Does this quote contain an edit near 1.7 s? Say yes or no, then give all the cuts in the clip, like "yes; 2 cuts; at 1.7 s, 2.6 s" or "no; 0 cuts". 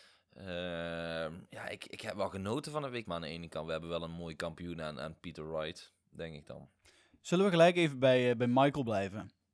no; 1 cut; at 3.1 s